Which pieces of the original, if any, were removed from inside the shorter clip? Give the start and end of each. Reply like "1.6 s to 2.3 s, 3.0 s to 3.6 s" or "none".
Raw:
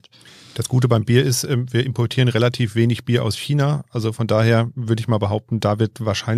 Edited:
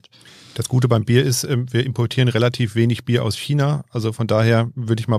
none